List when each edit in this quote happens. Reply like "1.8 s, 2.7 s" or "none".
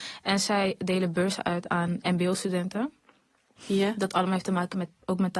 3.6 s